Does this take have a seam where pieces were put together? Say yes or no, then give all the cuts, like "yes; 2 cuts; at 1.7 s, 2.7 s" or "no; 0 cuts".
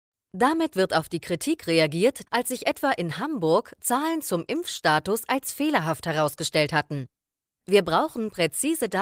yes; 1 cut; at 2.3 s